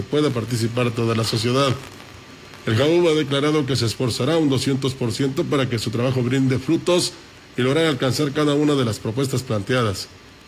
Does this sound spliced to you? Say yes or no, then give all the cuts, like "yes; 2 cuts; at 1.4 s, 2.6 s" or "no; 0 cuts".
no; 0 cuts